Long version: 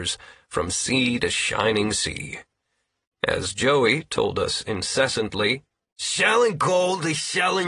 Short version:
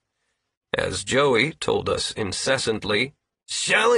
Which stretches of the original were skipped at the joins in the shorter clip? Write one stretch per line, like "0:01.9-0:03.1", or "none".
none